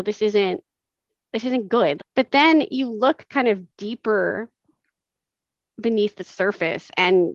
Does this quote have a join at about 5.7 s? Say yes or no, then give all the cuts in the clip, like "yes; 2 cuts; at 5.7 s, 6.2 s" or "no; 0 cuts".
no; 2 cuts; at 2.0 s, 3.7 s